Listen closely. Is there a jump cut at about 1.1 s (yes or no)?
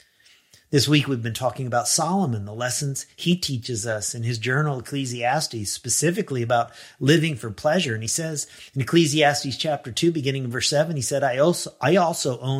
no